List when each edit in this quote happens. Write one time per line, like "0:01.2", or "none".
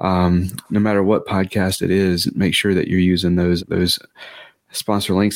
0:03.6